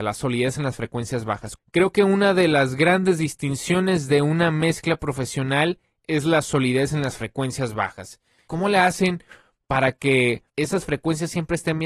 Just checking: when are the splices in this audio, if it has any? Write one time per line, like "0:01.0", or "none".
0:01.6
0:08.5
0:10.5